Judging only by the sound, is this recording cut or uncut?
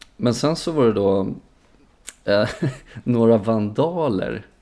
uncut